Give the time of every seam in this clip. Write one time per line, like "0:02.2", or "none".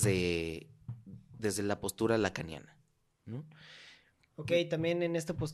none